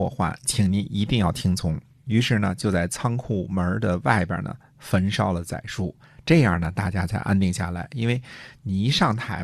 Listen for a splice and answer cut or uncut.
uncut